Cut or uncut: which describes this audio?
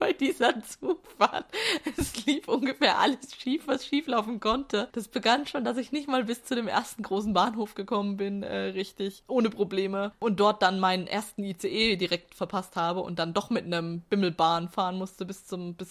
uncut